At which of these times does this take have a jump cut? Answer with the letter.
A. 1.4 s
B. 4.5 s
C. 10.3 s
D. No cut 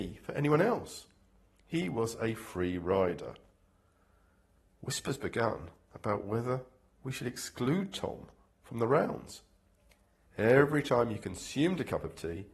C